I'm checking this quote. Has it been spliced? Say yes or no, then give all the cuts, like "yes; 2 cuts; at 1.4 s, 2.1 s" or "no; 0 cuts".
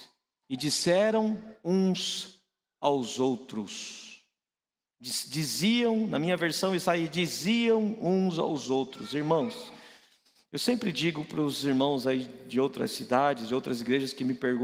no; 0 cuts